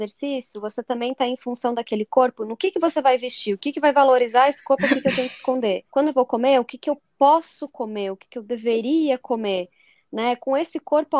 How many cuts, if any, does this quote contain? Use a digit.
1